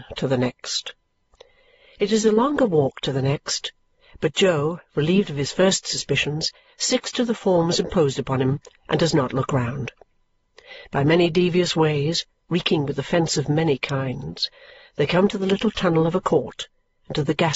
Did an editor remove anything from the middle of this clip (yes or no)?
no